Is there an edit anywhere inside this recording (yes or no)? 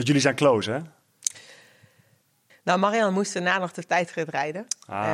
yes